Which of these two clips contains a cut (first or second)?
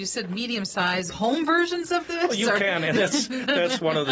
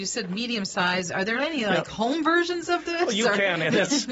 first